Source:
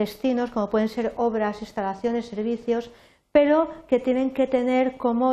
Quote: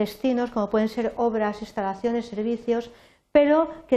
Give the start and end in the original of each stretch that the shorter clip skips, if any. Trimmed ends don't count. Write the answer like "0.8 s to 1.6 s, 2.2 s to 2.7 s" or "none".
none